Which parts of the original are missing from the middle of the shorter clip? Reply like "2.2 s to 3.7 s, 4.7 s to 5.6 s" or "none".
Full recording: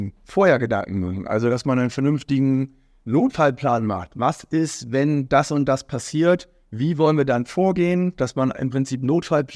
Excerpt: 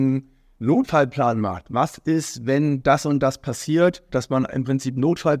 6.5 s to 8.1 s

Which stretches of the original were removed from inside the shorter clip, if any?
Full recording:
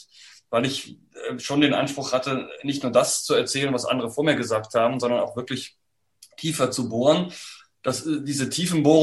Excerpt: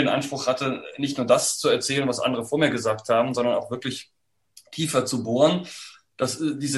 none

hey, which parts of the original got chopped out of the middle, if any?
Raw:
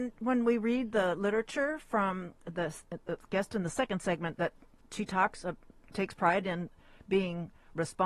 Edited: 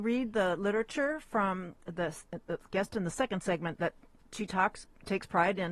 5.4 s to 5.7 s

